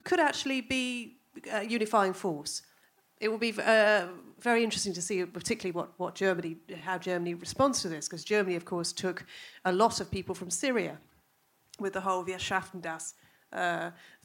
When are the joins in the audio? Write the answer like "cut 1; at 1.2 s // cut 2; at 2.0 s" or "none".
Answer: none

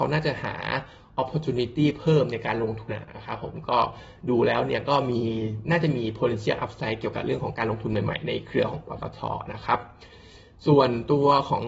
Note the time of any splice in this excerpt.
cut 1; at 2.9 s

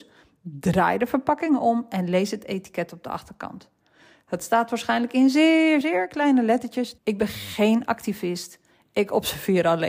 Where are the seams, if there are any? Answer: cut 1; at 5.8 s // cut 2; at 7.0 s

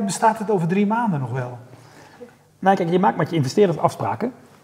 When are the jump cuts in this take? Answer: cut 1; at 2.5 s

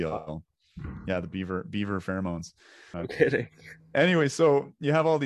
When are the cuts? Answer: cut 1; at 2.9 s

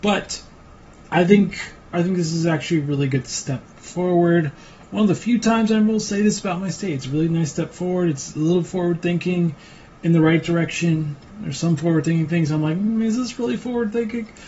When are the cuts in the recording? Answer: cut 1; at 1.9 s

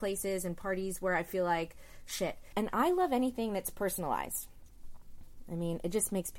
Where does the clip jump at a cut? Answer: cut 1; at 2.5 s

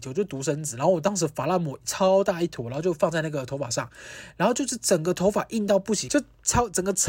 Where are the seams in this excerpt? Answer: cut 1; at 6.1 s

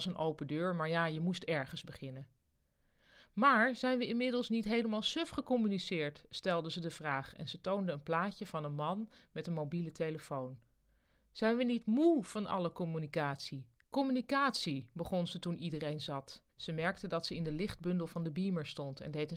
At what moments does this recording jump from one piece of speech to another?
cut 1; at 13.8 s // cut 2; at 16.5 s

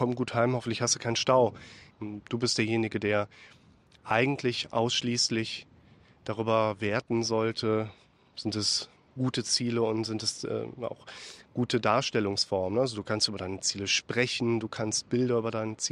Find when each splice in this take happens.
cut 1; at 1.9 s

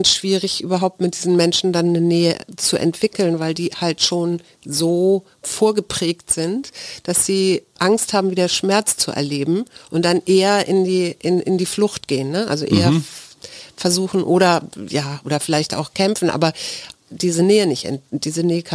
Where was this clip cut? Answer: none

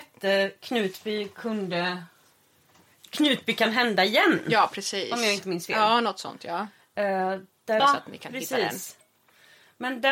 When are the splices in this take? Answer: cut 1; at 7.8 s

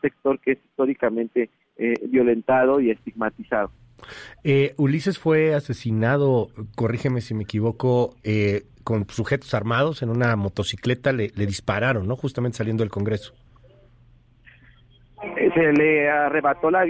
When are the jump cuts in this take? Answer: none

